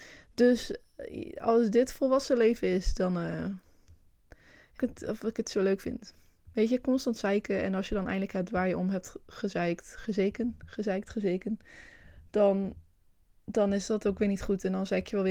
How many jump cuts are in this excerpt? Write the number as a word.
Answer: one